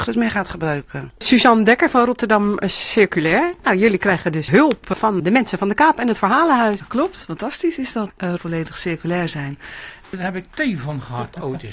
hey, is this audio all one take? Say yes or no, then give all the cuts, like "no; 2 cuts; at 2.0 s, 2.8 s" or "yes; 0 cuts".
no; 2 cuts; at 8.4 s, 10.0 s